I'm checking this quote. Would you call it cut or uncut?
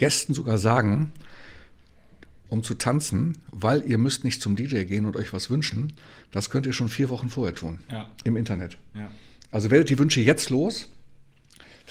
cut